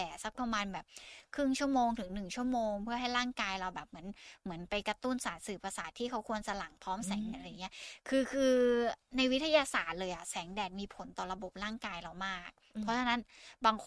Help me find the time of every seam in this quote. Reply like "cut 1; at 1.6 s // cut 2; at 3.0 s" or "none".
cut 1; at 7.3 s